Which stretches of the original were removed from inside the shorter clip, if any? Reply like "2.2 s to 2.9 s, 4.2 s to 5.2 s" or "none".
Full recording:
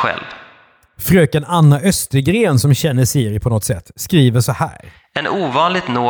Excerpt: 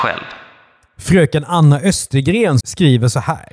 2.6 s to 3.9 s